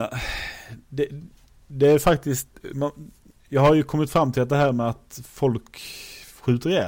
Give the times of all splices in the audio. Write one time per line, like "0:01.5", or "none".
none